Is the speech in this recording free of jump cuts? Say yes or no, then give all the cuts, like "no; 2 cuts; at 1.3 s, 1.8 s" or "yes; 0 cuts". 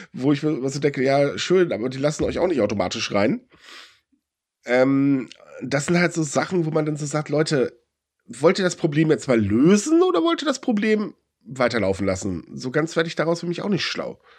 yes; 0 cuts